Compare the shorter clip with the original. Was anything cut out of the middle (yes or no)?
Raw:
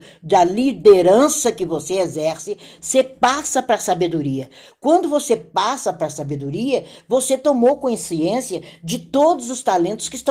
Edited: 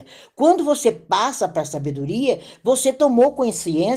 no